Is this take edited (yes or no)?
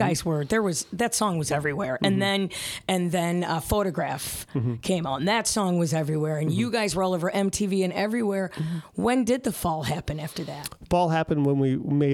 no